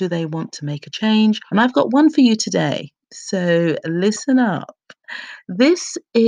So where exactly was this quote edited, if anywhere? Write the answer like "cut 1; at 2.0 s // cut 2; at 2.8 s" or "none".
cut 1; at 1.5 s